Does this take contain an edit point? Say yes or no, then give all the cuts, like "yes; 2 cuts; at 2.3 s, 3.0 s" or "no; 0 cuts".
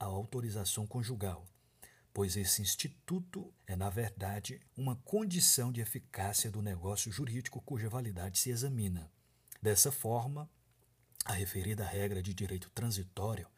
yes; 3 cuts; at 3.6 s, 4.7 s, 9.6 s